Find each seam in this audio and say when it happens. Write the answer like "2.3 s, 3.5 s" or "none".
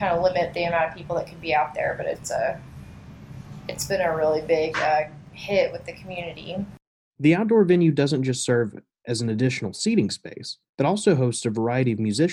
10.7 s

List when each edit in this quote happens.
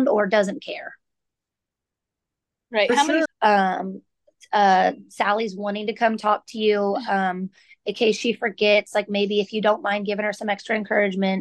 3.2 s

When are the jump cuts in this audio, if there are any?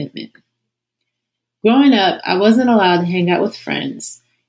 none

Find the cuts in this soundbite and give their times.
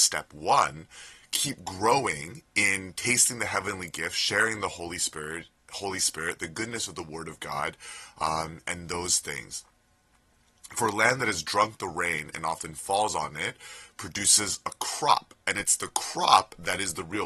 none

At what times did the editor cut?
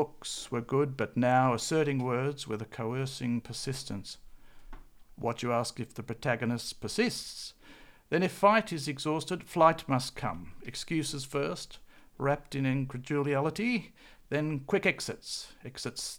none

